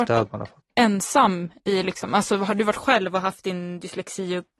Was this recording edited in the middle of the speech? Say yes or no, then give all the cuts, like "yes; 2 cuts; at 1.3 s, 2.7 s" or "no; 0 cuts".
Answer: no; 0 cuts